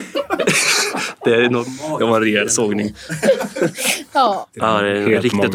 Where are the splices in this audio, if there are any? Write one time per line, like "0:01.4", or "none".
0:04.5